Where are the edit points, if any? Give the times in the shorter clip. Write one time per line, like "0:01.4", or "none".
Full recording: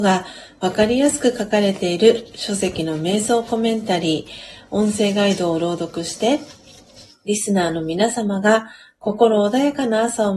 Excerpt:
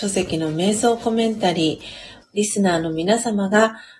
0:02.2